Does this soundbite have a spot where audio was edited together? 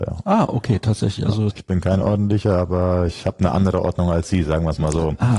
yes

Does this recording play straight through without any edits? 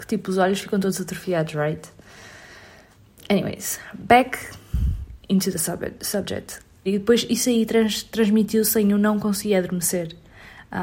no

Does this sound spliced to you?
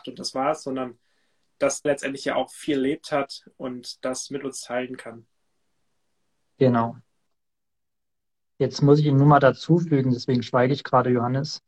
yes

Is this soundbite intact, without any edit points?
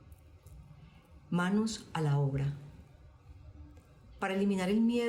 yes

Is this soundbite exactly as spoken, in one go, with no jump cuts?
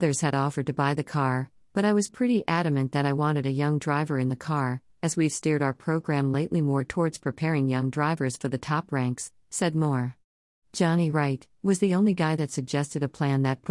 yes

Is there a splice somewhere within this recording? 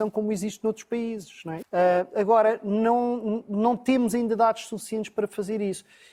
yes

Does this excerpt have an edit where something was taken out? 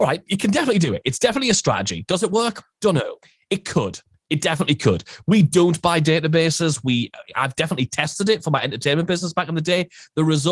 no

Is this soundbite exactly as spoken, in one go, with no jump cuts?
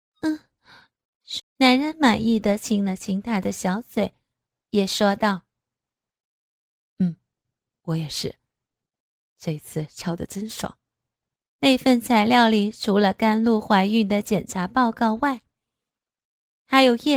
no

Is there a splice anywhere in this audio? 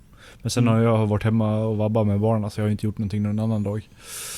no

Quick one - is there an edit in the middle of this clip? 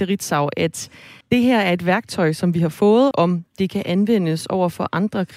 yes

